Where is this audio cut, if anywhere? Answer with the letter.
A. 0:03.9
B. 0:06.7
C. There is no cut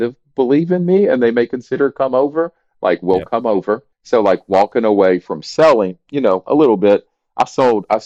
A